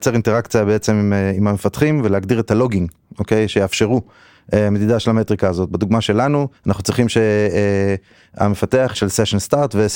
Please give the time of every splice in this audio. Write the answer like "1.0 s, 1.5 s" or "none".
6.6 s, 8.9 s